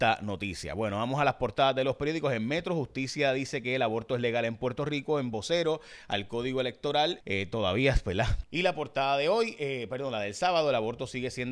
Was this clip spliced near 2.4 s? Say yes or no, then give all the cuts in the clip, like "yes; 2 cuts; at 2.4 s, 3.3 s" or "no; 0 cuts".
no; 2 cuts; at 7.2 s, 8.4 s